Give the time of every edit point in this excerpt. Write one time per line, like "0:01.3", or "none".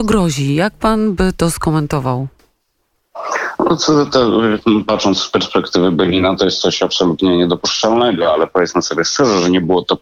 none